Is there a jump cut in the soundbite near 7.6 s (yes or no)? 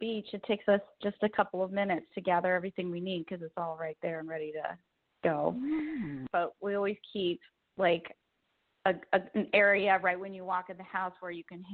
no